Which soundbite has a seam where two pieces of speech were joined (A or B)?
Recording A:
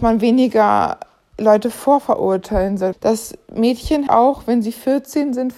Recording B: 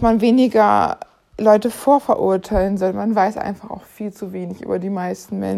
A